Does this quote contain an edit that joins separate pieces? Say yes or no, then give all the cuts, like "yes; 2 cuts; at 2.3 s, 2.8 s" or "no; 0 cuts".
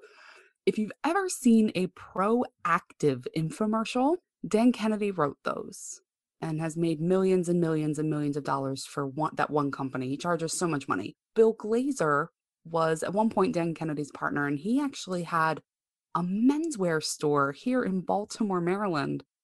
no; 0 cuts